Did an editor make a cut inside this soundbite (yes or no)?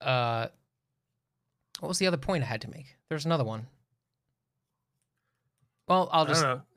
no